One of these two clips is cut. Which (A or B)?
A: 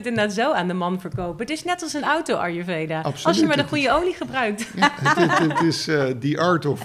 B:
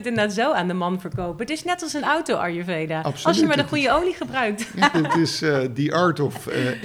B